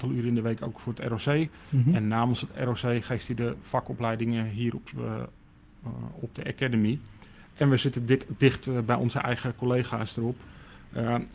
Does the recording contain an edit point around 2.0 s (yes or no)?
no